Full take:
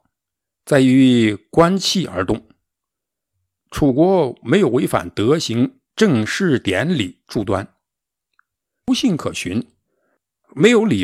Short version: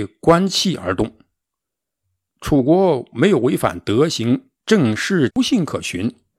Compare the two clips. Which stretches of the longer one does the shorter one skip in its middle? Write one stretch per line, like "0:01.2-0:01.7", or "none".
0:06.6-0:08.8